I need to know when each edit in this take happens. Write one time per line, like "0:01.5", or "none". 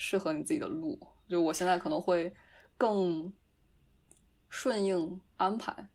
none